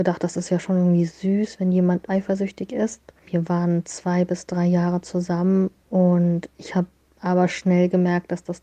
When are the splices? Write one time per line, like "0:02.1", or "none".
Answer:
0:02.1